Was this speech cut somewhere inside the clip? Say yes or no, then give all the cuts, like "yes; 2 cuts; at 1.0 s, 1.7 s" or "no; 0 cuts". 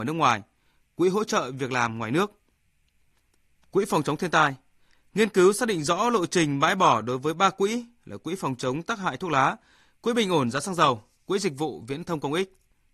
no; 0 cuts